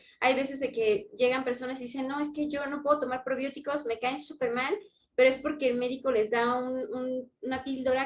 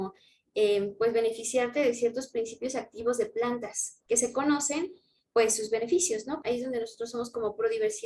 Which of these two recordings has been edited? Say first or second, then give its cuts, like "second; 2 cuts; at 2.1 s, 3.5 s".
second; 1 cut; at 6.4 s